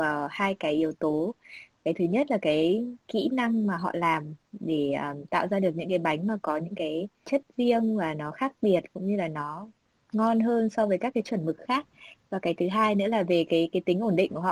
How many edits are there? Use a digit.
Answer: 0